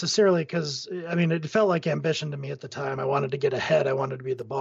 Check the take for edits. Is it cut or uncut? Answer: uncut